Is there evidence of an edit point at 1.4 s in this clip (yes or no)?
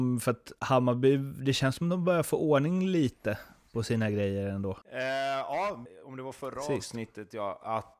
no